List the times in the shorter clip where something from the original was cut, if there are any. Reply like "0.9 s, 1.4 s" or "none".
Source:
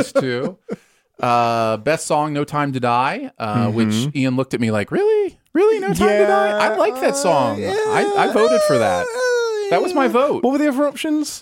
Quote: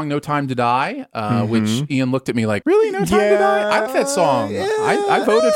2.6 s, 3.9 s

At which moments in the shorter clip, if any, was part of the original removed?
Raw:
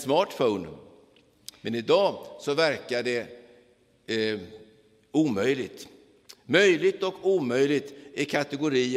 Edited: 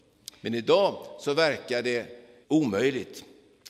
2.4 s

